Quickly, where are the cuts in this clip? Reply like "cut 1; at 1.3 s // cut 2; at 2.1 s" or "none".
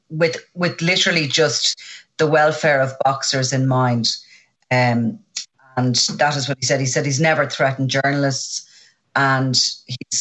none